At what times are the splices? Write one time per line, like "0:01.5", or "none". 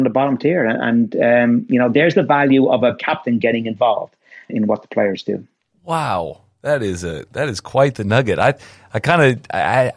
none

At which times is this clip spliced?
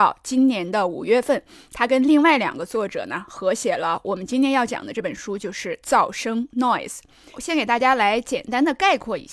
0:07.3

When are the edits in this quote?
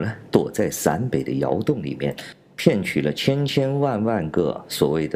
none

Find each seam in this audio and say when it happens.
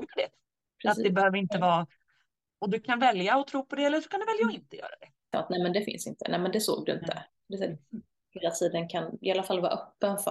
0:05.3
0:08.3

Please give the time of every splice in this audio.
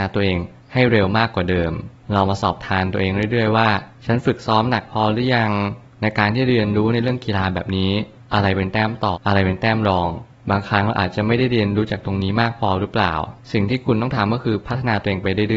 0:09.1

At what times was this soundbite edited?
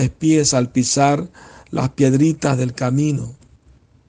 none

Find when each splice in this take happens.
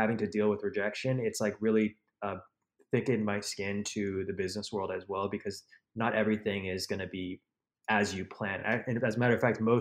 none

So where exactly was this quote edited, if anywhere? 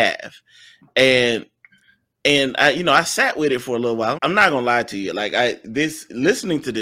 0:04.2

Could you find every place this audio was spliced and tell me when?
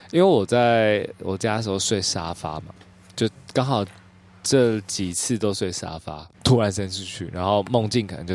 0:06.3

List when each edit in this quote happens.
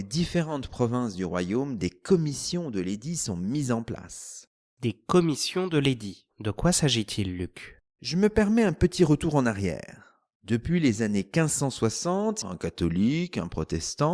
0:12.4

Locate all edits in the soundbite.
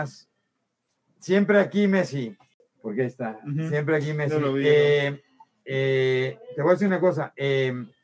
none

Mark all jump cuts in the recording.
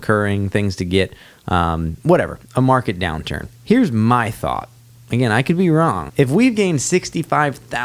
0:03.5
0:06.1

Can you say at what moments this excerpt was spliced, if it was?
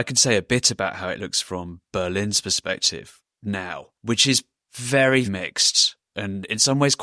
0:03.9
0:05.2

